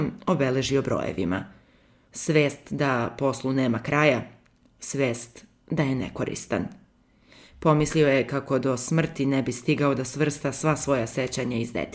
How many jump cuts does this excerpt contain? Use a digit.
1